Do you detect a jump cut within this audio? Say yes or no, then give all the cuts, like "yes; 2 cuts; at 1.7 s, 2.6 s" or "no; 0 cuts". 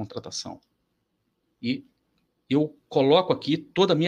yes; 2 cuts; at 1.4 s, 2.8 s